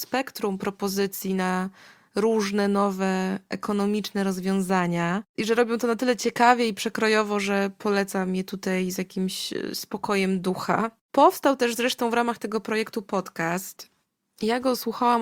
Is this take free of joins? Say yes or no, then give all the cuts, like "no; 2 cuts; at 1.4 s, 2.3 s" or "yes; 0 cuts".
yes; 0 cuts